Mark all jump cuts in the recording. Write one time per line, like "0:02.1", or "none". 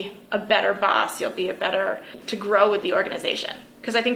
0:02.2

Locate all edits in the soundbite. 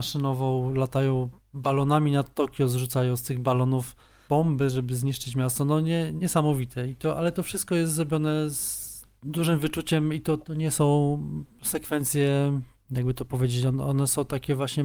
none

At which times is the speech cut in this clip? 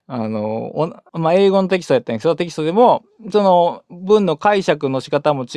0:01.1

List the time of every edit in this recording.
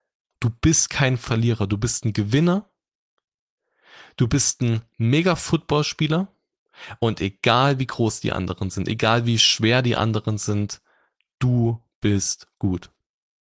none

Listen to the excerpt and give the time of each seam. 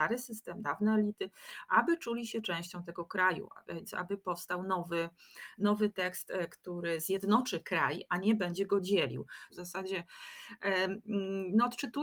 0:09.5

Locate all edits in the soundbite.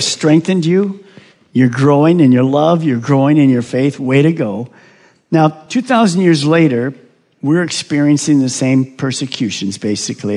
none

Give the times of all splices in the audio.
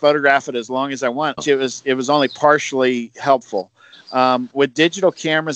0:01.4

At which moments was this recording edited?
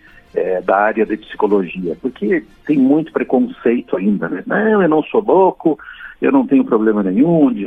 0:04.4

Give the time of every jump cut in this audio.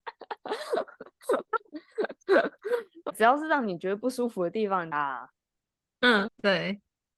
0:04.9
0:06.3

